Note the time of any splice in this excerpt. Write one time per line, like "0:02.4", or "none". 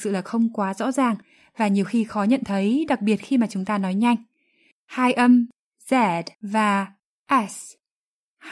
0:04.7
0:06.3

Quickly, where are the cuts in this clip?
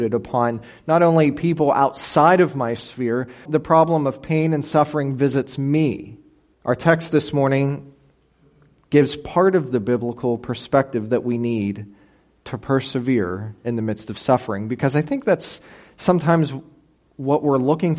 0:03.5
0:06.5

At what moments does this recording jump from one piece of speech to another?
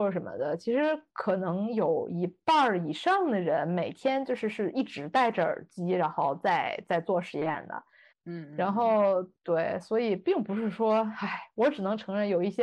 0:08.1

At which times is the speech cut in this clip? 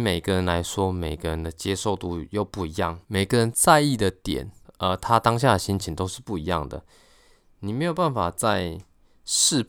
0:03.0

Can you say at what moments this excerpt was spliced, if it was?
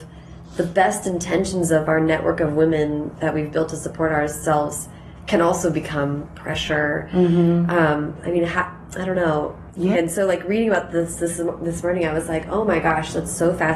0:09.9

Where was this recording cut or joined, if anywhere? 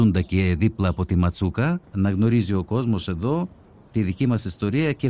0:01.8

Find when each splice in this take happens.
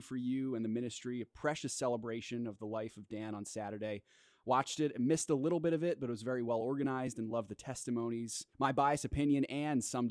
0:08.5

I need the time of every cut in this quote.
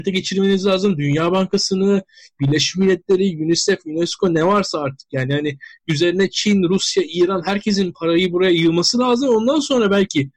none

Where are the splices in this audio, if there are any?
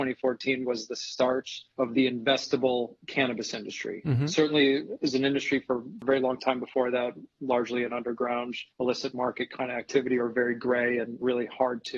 0:08.7

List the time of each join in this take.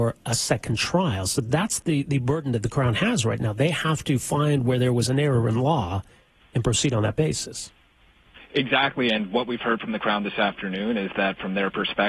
none

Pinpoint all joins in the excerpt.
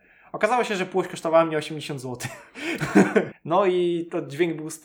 0:03.3

